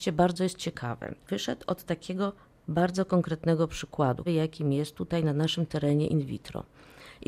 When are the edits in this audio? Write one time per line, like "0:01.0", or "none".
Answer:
0:04.3